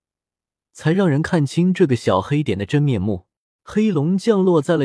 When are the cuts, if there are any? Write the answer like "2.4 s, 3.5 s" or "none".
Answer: 3.6 s